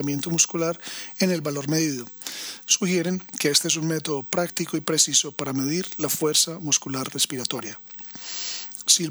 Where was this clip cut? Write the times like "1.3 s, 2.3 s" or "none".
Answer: 2.7 s

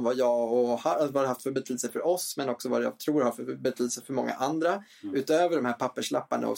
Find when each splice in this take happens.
none

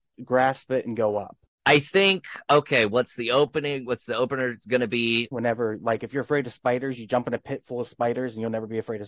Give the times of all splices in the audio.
5.3 s

